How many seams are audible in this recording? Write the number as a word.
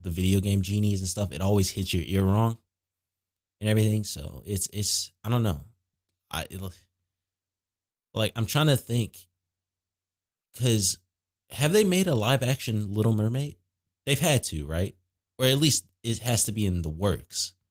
zero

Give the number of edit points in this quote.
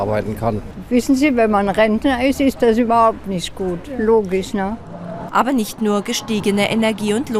one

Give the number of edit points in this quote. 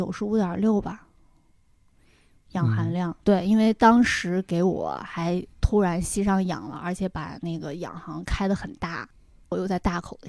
two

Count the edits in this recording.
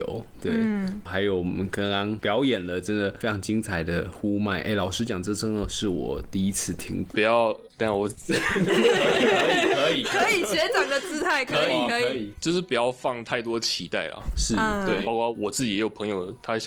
two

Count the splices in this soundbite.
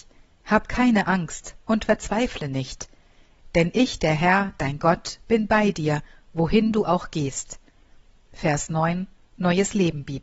zero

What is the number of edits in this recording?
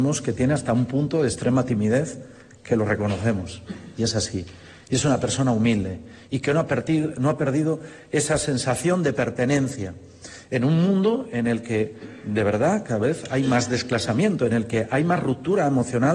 zero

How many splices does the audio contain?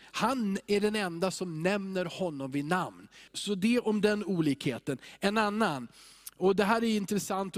one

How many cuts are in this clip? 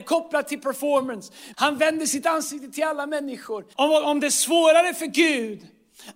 two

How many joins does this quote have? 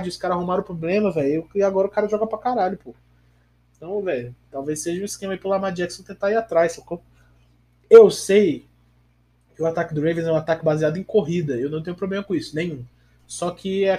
zero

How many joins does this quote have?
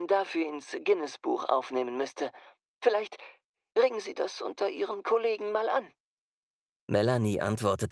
zero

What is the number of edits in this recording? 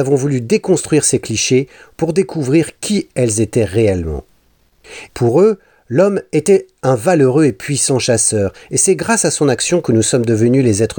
one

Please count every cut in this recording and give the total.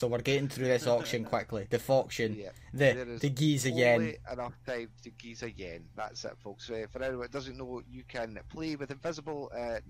zero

